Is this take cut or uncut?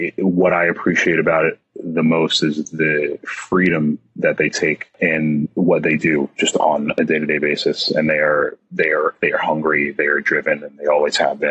uncut